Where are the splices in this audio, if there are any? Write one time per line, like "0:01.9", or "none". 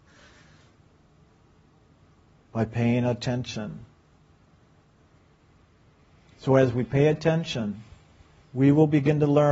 none